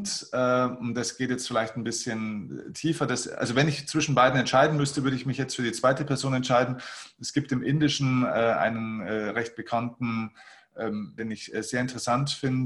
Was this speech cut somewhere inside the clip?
yes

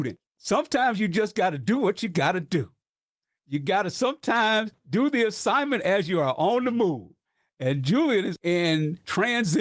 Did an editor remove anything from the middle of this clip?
yes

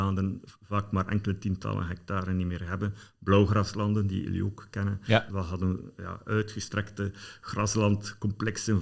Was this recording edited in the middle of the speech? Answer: yes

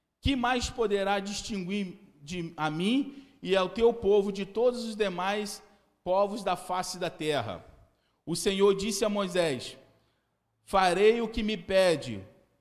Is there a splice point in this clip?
no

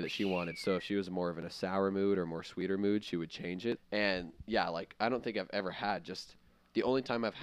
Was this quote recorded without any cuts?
no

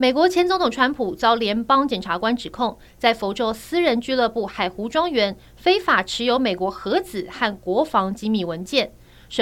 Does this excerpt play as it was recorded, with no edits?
yes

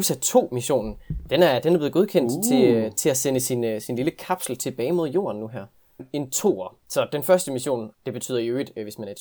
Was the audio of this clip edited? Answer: yes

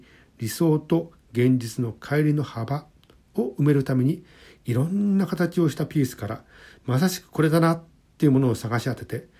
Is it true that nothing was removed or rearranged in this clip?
yes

